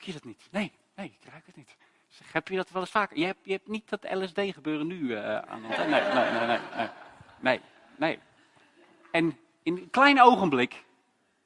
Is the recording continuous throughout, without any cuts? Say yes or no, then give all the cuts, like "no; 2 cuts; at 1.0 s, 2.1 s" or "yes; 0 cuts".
yes; 0 cuts